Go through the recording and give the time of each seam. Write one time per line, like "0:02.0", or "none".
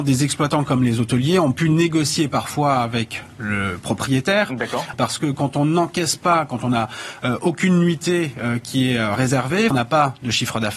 0:04.9
0:09.7